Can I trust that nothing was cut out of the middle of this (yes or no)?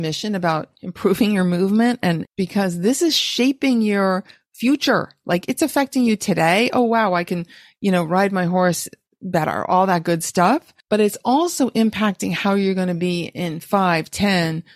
no